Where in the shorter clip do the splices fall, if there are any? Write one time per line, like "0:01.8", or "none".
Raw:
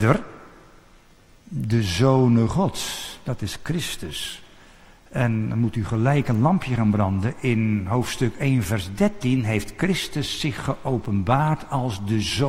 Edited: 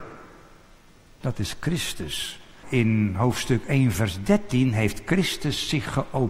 0:01.2
0:02.6